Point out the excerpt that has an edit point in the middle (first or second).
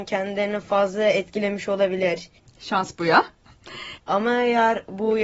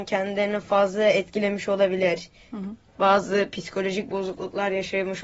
first